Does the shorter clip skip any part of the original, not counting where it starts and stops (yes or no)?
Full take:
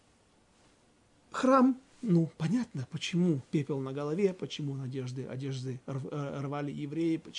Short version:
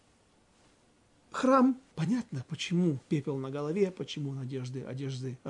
yes